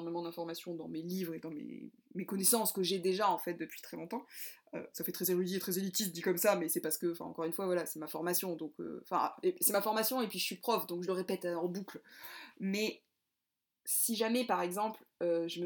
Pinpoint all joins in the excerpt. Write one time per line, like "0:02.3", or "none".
none